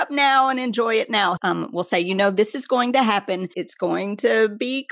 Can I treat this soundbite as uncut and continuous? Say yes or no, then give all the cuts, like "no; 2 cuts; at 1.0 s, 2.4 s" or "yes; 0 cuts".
no; 2 cuts; at 1.4 s, 3.5 s